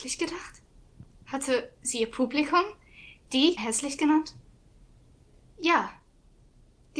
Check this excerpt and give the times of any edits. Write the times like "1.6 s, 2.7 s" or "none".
3.6 s